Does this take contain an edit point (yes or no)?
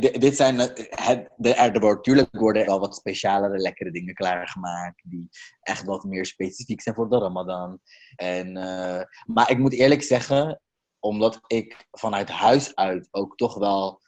yes